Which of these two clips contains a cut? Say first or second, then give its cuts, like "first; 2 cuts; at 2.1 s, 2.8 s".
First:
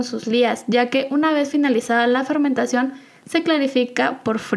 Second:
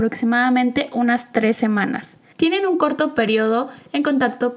second; 1 cut; at 2.3 s